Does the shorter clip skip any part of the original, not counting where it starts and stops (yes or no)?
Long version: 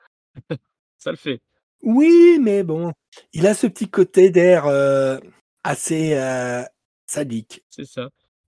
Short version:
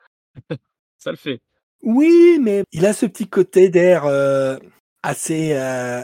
yes